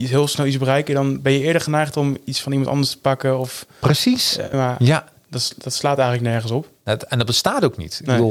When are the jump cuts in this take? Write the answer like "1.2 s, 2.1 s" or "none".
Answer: 4.5 s